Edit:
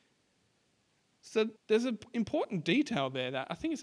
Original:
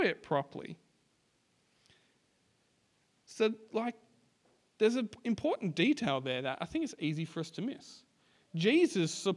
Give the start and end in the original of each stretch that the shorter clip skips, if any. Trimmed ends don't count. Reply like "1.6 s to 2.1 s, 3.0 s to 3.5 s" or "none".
3.6 s to 4.7 s